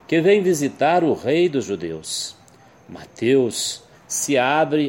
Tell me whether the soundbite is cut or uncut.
cut